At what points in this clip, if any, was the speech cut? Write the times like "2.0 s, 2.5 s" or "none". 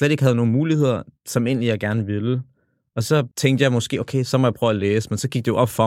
3.3 s